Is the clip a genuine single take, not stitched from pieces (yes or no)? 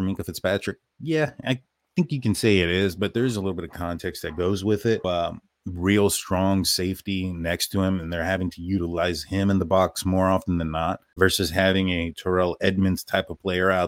no